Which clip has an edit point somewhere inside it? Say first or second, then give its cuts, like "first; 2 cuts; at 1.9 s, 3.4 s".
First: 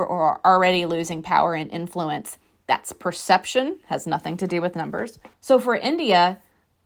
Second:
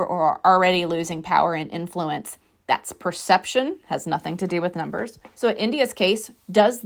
first; 1 cut; at 5.3 s